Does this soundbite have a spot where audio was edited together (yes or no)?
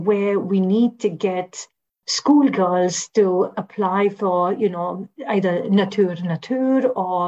no